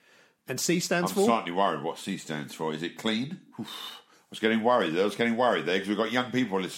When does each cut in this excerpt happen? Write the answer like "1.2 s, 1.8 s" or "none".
3.5 s